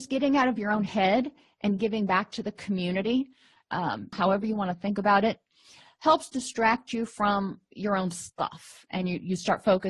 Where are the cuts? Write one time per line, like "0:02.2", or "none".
0:04.1